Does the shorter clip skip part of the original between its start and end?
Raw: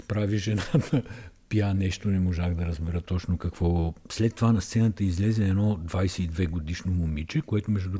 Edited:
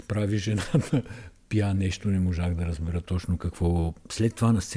no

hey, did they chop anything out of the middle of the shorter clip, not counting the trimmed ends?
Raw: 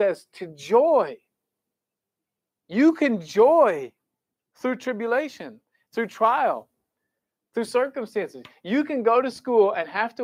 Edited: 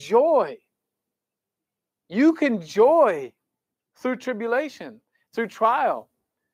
no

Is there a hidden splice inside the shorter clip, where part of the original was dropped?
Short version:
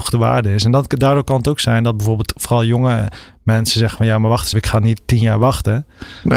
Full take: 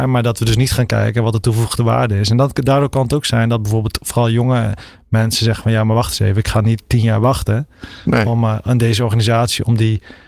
yes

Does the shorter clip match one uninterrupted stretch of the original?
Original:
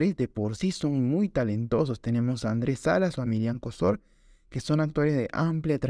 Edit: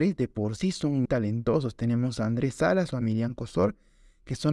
no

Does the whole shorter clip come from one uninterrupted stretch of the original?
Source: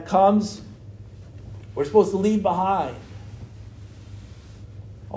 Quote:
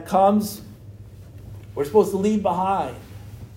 yes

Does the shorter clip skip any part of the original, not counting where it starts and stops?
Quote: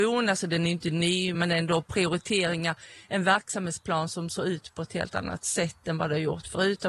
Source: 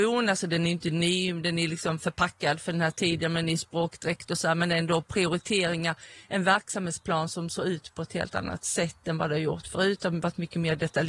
yes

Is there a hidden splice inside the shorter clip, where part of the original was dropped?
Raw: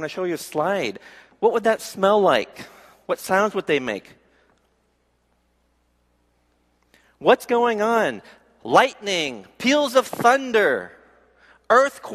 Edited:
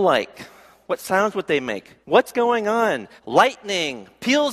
yes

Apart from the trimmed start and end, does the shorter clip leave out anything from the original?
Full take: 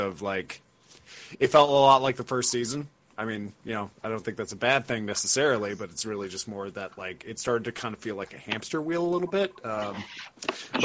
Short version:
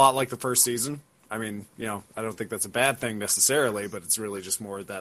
no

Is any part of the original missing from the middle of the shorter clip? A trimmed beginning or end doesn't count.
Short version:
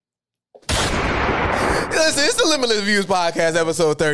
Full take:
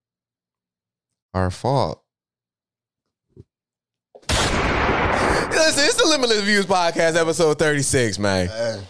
no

